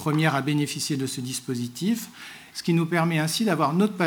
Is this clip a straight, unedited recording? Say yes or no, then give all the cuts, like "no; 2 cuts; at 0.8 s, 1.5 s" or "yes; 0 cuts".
no; 1 cut; at 2.5 s